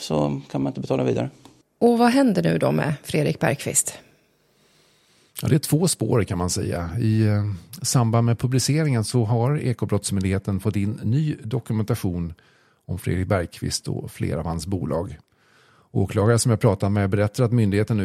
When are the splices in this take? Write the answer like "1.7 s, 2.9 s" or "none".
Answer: none